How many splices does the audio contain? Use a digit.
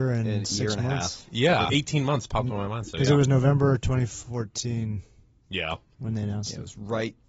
1